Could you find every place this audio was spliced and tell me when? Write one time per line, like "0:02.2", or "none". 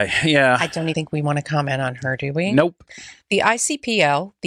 0:00.9
0:03.2